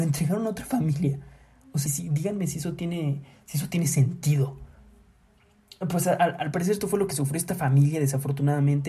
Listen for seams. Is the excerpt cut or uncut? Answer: cut